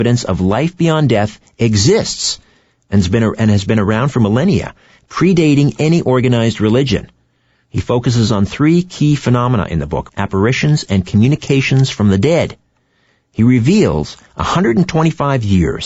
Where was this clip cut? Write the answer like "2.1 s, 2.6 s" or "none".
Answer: 10.1 s